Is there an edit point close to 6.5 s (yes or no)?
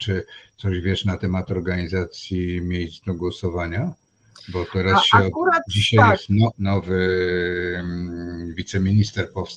yes